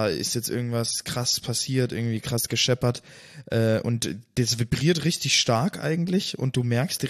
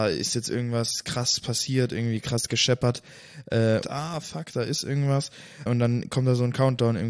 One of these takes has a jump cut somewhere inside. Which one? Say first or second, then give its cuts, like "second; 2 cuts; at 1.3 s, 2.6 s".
second; 2 cuts; at 3.8 s, 5.7 s